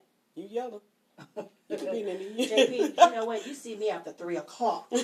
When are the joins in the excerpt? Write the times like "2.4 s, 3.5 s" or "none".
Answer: none